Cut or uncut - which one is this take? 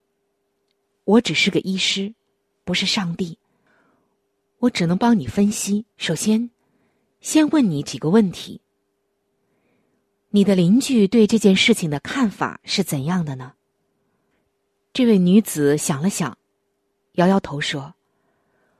cut